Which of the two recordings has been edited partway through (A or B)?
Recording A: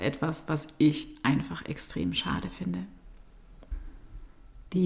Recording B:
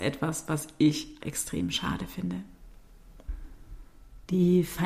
B